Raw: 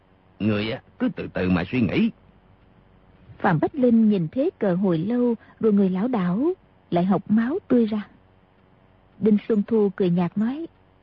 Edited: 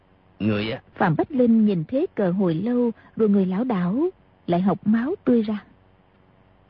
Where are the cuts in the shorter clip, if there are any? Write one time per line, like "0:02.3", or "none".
0:00.9

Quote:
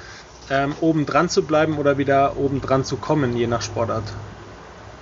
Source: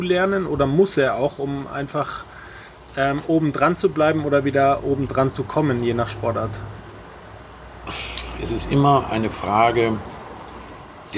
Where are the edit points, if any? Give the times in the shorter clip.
none

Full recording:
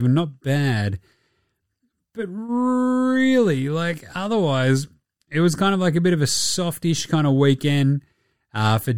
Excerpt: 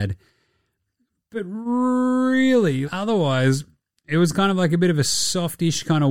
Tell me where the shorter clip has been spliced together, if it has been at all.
0:02.8

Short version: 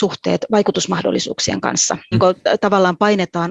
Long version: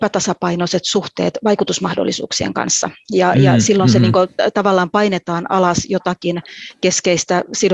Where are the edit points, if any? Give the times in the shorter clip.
0:02.1

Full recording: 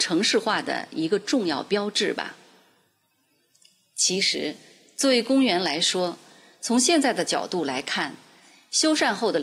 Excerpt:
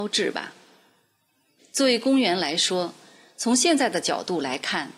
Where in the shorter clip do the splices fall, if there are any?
0:01.6

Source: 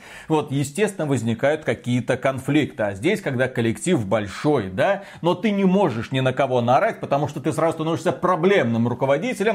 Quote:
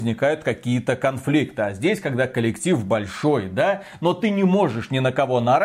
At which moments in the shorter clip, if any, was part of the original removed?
none

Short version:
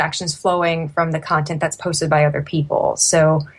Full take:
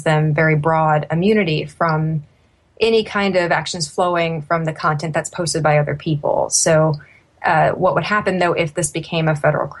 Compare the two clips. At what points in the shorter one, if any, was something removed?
none

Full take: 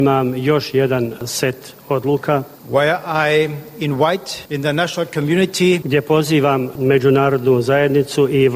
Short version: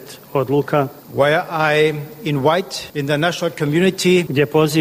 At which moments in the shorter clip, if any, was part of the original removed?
none

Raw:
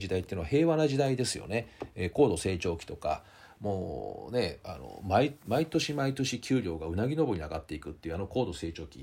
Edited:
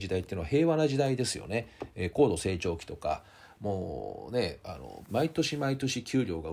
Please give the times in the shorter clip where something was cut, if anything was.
0:05.0

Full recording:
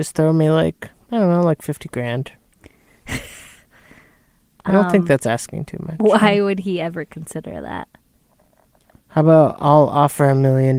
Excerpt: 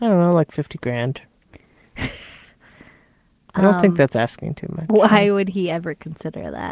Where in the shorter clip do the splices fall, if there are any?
none

